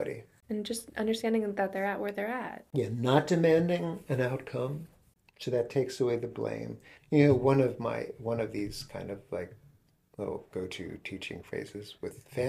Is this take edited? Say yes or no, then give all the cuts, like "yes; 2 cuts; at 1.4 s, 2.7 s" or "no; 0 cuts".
yes; 1 cut; at 7.0 s